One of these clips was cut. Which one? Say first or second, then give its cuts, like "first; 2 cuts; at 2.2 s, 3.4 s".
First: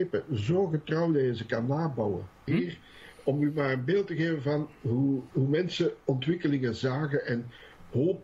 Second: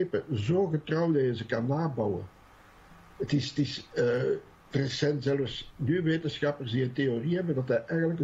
first; 2 cuts; at 2.5 s, 5.3 s